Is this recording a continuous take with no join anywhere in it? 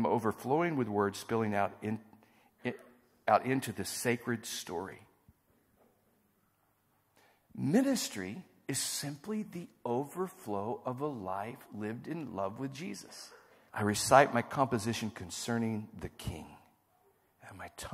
no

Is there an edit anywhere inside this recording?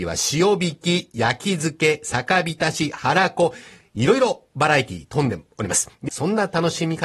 yes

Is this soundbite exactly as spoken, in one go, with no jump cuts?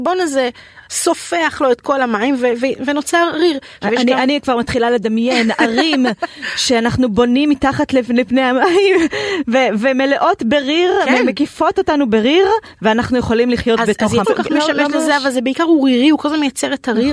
no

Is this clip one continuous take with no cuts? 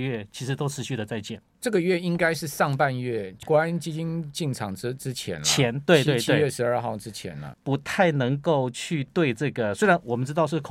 no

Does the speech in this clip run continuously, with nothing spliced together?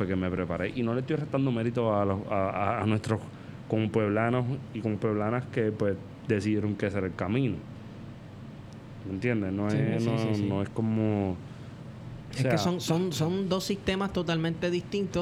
yes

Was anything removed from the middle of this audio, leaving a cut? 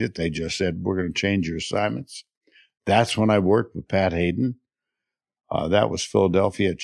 yes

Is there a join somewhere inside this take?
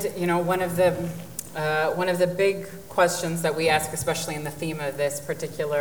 no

